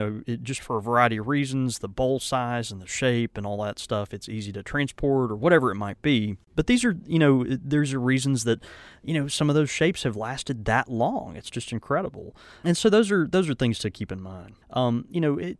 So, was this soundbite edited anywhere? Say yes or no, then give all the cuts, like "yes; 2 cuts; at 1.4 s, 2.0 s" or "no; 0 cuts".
yes; 1 cut; at 14.6 s